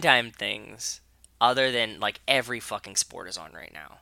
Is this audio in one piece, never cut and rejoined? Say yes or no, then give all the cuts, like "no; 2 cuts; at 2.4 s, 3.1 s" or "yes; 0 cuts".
yes; 0 cuts